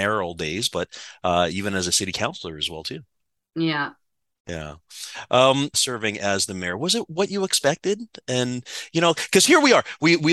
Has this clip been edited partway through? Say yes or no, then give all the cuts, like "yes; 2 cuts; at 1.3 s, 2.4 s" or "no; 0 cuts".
yes; 1 cut; at 5.7 s